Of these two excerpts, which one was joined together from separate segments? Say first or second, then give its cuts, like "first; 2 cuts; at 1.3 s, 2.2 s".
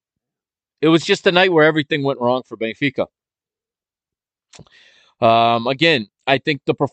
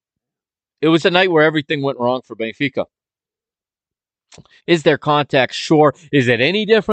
second; 2 cuts; at 1.0 s, 4.6 s